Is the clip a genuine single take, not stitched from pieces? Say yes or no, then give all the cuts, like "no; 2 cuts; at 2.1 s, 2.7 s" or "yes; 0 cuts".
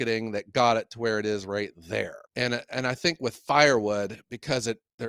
no; 1 cut; at 2.3 s